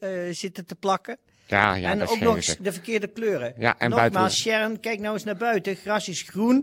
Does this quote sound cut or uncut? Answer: uncut